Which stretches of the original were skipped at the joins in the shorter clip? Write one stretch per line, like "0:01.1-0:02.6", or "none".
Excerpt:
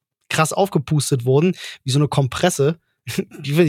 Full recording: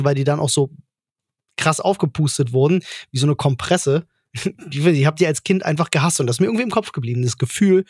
none